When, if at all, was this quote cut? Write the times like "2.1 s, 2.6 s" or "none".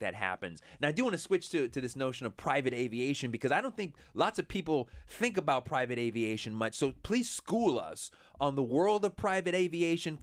none